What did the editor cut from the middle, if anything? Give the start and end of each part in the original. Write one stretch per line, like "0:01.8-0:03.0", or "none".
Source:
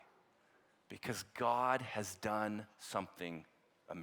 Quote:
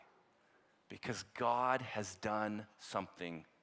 none